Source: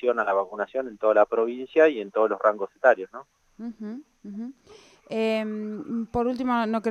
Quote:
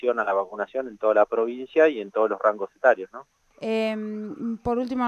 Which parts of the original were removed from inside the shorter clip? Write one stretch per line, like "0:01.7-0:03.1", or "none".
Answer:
0:03.5-0:05.0